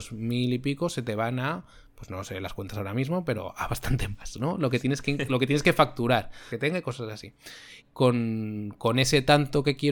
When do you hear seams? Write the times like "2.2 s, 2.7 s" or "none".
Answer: 6.5 s, 7.8 s